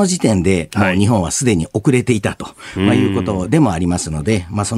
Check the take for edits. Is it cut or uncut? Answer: uncut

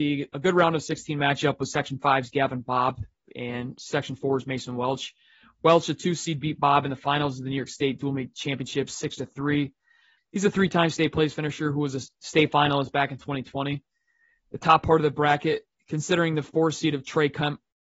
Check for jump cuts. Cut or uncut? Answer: cut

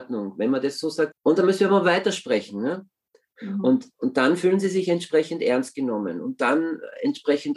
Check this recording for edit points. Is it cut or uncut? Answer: cut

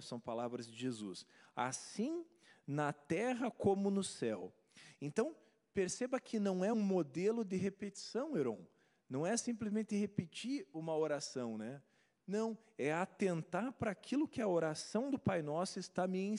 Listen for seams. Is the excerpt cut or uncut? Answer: cut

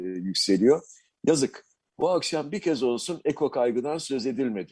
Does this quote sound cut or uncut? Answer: uncut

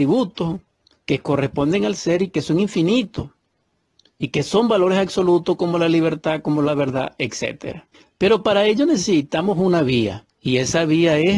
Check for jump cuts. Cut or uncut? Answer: uncut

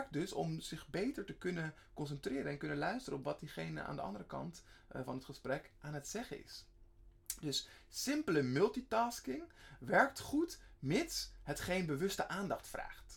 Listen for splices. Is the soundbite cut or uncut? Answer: uncut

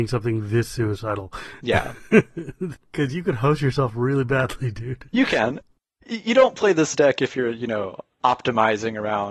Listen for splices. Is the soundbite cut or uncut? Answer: uncut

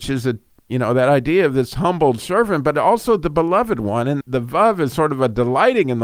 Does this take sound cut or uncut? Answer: cut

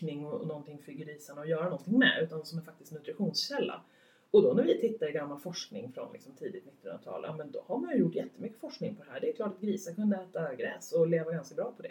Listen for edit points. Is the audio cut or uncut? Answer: uncut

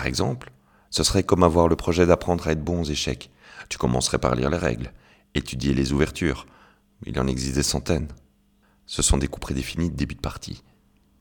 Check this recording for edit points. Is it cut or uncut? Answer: uncut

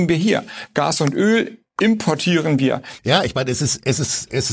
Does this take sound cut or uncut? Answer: cut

